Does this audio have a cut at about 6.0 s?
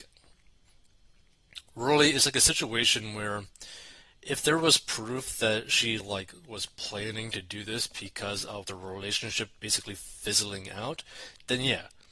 yes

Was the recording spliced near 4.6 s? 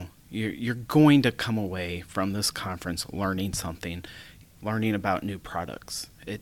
yes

